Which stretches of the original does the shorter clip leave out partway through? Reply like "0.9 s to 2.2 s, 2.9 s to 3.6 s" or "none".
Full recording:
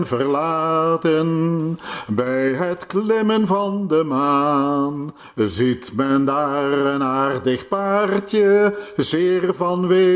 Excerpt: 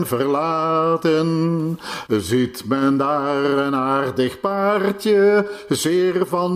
2.1 s to 5.3 s

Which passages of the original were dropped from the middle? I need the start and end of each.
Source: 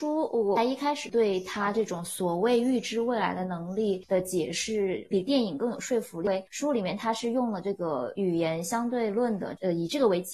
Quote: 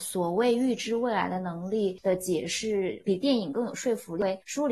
none

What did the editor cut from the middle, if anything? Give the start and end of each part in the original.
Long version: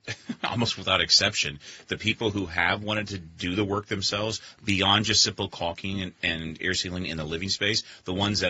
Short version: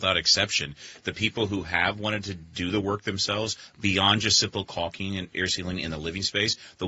6.2 s to 6.6 s

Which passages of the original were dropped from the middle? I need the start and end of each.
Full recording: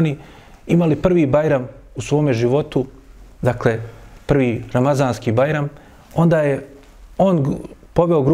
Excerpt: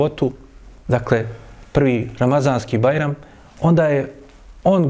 none

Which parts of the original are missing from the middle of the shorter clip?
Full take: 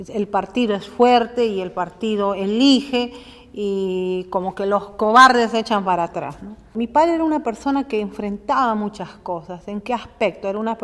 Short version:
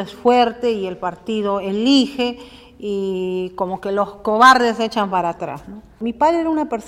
none

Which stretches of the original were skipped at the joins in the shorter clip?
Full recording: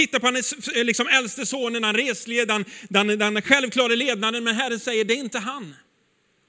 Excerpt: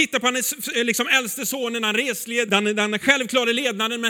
2.5 s to 2.9 s

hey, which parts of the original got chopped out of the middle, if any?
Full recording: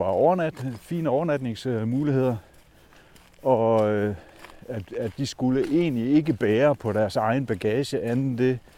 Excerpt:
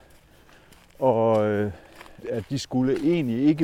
4.6 s to 4.9 s

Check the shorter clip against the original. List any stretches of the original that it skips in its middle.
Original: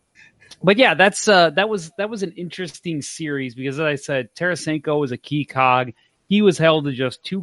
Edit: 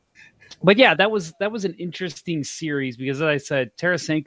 1.0 s to 1.5 s

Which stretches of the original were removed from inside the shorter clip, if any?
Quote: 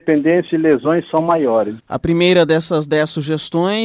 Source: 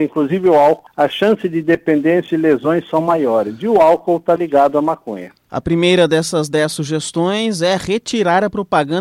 3.6 s to 5.4 s

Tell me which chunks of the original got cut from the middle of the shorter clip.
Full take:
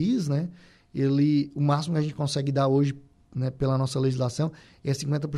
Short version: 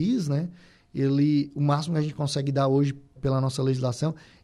3.2 s to 3.5 s

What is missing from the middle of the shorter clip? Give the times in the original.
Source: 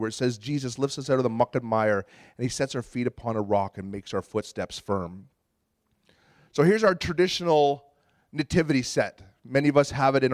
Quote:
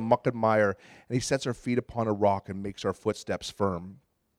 none

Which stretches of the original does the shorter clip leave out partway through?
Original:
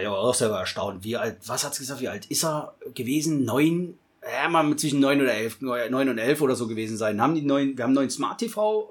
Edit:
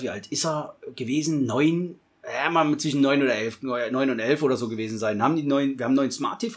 none

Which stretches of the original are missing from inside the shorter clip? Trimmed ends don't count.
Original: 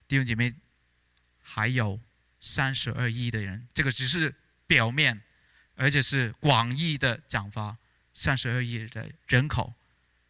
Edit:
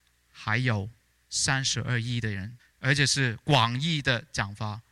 3.7 s to 5.5 s

